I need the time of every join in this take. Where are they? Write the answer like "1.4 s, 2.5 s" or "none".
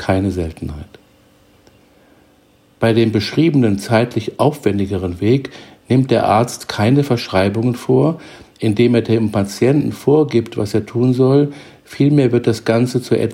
none